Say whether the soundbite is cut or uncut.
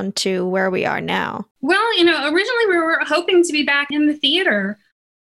cut